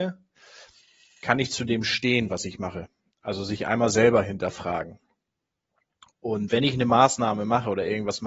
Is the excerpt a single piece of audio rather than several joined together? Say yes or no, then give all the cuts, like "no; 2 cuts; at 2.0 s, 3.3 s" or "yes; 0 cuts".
yes; 0 cuts